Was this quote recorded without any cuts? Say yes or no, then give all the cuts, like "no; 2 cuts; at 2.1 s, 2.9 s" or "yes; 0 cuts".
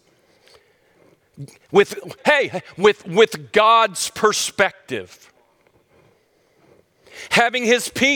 no; 1 cut; at 2.2 s